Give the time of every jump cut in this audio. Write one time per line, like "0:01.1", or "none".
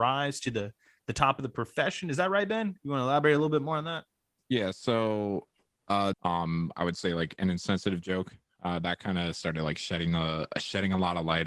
0:06.1